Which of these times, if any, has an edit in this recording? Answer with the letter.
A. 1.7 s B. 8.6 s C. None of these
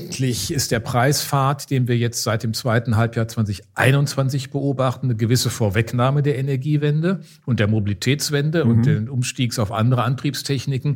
C